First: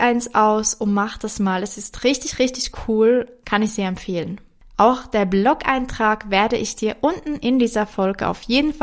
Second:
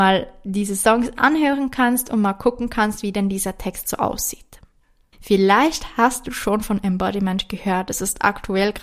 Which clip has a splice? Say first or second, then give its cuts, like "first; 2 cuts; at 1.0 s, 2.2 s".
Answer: second; 1 cut; at 5.1 s